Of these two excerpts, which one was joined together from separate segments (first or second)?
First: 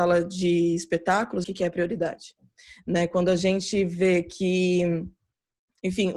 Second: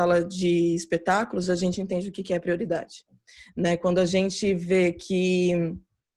first